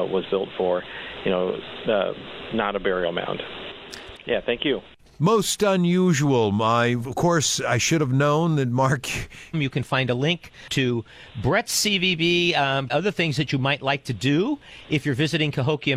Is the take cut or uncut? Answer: cut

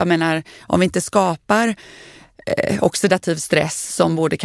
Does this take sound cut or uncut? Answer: uncut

